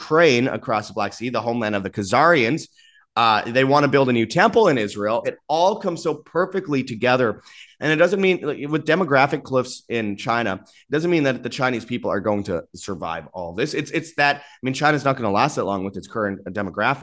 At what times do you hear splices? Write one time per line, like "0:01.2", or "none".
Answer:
0:05.2
0:07.7